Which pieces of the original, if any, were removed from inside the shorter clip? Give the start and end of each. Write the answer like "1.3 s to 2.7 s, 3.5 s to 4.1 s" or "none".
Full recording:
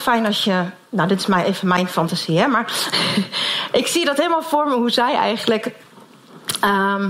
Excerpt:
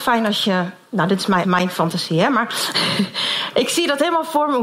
1.4 s to 1.6 s